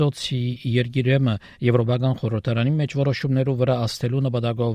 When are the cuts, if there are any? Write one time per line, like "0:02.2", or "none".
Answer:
none

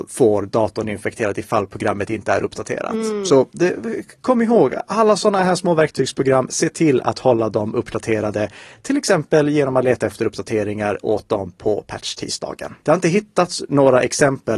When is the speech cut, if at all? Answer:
0:12.8

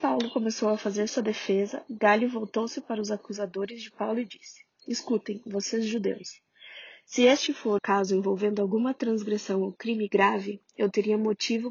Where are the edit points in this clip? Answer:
0:07.8

